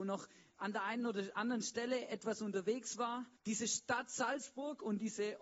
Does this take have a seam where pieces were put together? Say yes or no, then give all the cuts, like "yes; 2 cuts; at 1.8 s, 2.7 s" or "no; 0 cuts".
yes; 1 cut; at 3.4 s